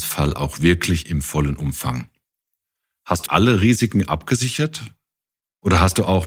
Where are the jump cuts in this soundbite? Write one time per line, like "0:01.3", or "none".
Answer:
0:03.3

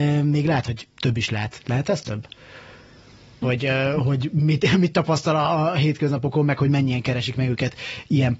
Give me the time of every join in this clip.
0:03.4

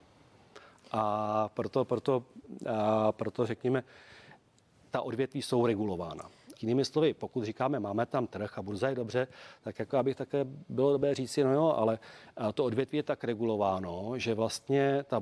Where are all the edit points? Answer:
0:06.6

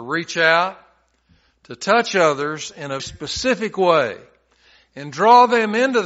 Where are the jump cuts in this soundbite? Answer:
0:03.0

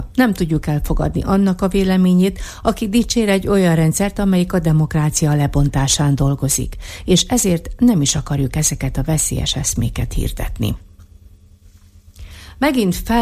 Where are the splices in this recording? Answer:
none

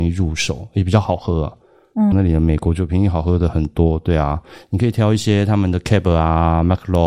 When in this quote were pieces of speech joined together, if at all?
0:02.1

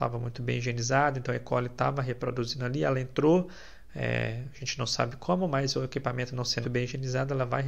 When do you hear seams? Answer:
0:06.6

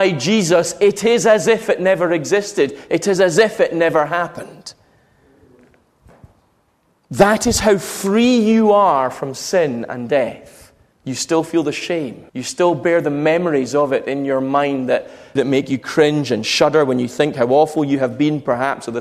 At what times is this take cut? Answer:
0:10.9
0:12.3
0:15.4

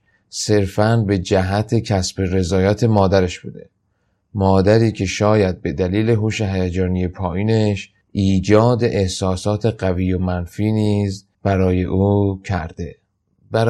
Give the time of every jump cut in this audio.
0:08.0
0:11.3

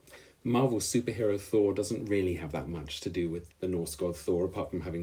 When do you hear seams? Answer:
0:03.5

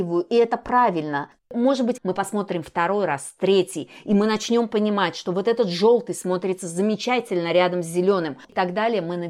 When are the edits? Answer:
0:02.0

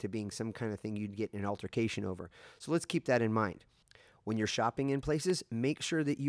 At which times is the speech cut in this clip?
none

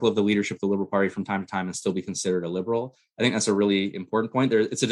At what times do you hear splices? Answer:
none

